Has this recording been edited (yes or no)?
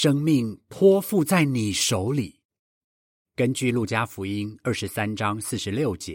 yes